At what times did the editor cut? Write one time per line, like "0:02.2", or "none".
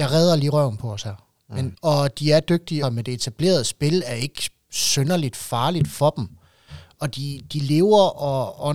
0:01.7
0:02.8